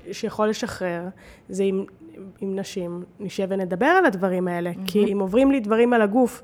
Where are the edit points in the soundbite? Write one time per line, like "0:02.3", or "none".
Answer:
0:02.4
0:05.1